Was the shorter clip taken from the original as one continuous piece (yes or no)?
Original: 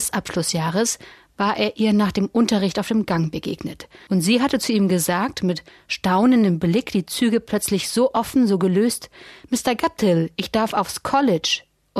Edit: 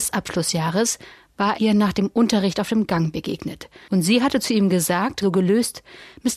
no